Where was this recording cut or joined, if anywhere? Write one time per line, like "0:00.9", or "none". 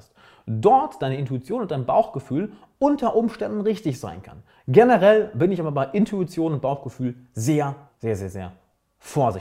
0:07.9